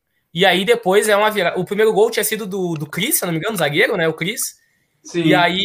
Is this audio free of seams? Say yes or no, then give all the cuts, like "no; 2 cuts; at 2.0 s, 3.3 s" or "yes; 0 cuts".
yes; 0 cuts